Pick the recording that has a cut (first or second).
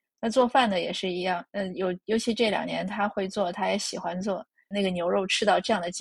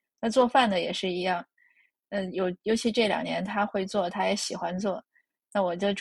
first